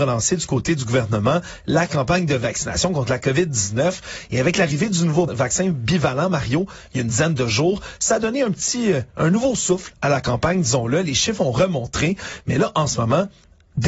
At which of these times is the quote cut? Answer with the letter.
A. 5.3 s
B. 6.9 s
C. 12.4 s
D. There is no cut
A